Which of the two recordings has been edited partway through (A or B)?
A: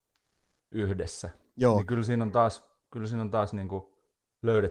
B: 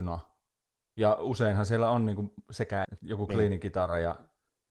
B